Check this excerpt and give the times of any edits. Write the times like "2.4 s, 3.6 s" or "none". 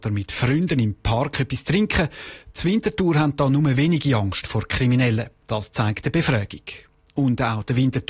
none

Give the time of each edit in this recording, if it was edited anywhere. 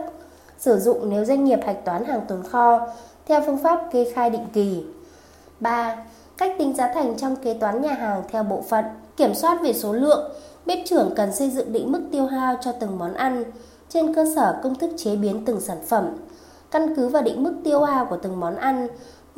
9.1 s

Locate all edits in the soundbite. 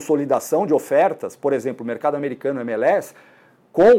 none

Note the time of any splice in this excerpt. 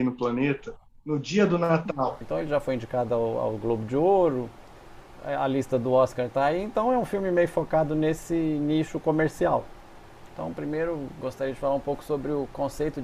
2.2 s, 10.3 s

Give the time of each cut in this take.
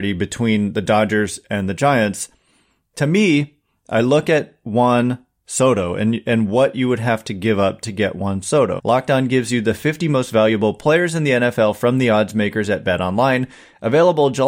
8.8 s

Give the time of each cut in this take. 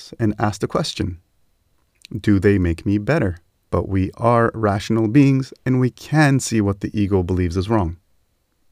3.6 s

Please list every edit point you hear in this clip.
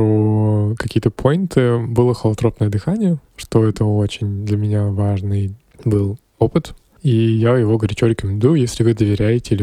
none

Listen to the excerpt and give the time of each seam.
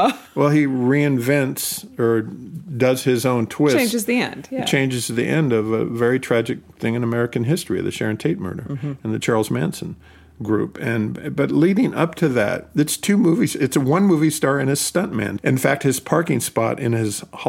15.4 s

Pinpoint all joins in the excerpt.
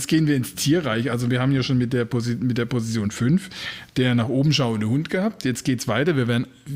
none

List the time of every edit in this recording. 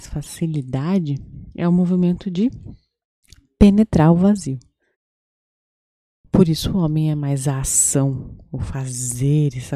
none

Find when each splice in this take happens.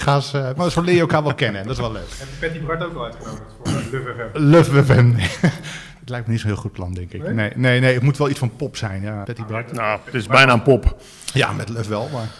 9.2 s

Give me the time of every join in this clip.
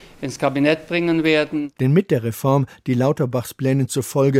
1.8 s

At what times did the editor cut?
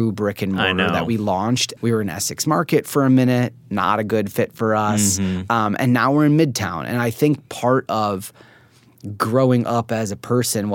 1.8 s

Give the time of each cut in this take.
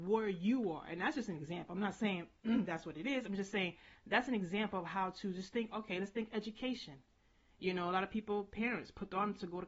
none

